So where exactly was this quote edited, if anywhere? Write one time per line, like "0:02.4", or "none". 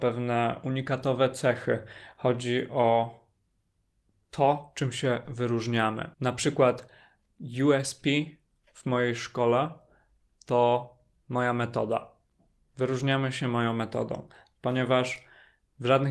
0:06.1